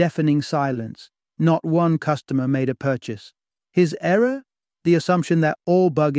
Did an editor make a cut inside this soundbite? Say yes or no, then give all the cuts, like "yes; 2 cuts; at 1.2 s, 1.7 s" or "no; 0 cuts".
yes; 1 cut; at 3.6 s